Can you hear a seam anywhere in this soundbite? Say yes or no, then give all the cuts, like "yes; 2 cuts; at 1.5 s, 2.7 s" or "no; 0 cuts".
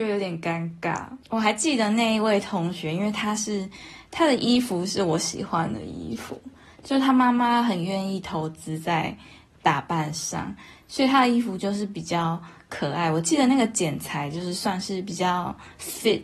no; 0 cuts